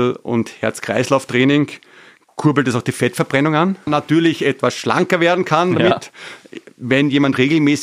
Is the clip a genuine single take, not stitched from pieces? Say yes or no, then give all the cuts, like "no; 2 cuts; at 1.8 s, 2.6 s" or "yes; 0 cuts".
no; 1 cut; at 3.9 s